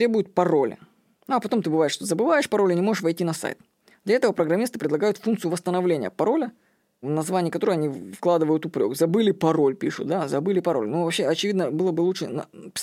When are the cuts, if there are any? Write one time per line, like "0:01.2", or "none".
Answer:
0:07.0